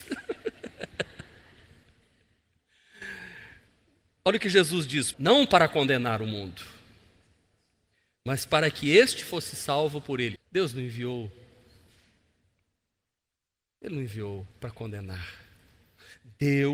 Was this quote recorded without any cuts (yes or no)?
no